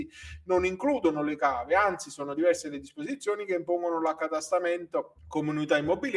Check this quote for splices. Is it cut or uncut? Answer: cut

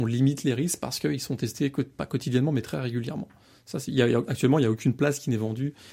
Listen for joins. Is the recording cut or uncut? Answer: uncut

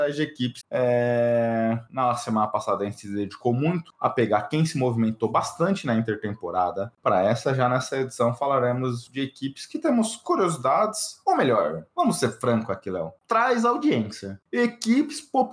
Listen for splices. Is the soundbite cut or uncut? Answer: uncut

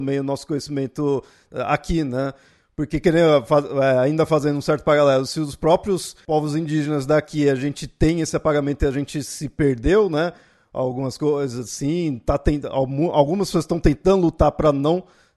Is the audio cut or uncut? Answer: uncut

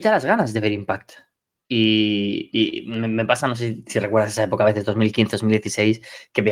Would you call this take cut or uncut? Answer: uncut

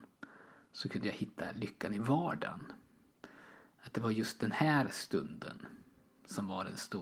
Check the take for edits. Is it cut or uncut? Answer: uncut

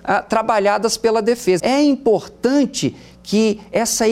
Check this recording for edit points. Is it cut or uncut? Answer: cut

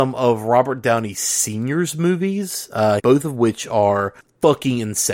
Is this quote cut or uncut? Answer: cut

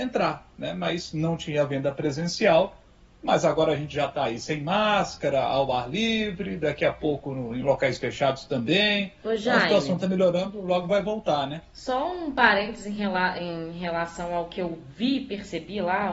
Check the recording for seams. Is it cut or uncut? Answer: uncut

